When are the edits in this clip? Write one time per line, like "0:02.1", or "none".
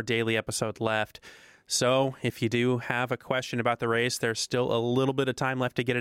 none